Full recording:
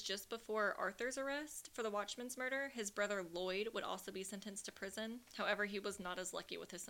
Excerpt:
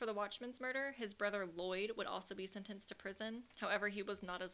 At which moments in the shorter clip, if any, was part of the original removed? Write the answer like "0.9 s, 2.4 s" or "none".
none